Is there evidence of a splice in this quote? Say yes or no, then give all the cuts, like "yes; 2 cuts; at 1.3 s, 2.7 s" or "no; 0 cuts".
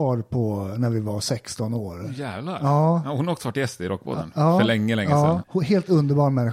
yes; 1 cut; at 5.4 s